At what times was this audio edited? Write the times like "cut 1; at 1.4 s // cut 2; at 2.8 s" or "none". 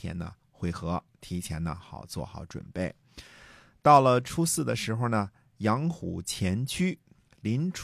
none